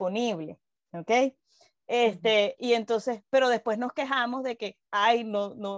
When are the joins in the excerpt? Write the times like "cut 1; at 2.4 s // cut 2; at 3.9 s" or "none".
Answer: cut 1; at 4.9 s